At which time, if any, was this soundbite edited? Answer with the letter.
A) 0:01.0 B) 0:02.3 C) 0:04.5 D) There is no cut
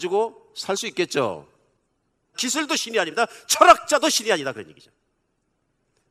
B